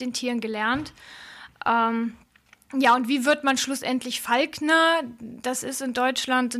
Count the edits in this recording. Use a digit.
0